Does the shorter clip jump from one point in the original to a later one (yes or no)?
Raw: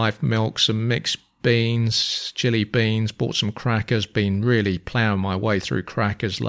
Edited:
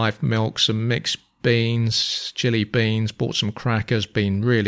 no